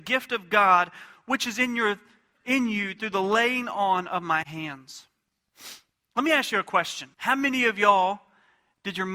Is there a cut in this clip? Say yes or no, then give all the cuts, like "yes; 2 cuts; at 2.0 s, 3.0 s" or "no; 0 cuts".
yes; 1 cut; at 7.1 s